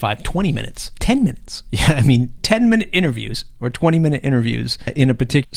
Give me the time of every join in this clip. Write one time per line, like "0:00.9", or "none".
0:02.4